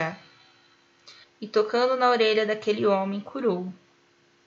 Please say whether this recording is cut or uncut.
cut